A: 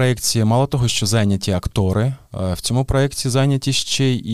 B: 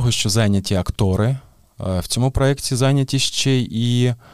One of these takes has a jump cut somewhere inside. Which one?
A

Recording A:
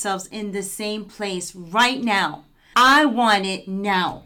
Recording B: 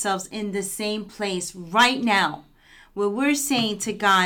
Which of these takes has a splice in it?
A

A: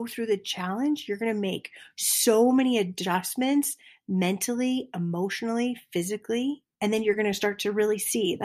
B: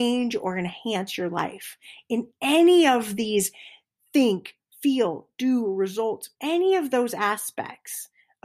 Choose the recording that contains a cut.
B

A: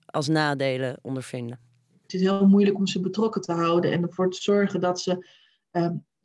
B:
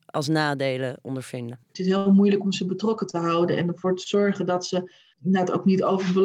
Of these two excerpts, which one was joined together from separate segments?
B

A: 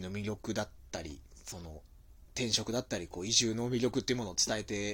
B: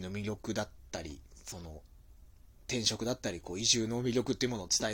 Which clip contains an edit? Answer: A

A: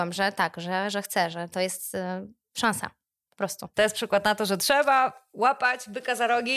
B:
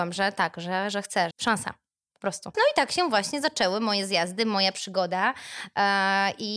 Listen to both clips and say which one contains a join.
B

